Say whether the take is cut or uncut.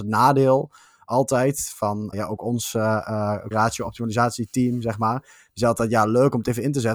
cut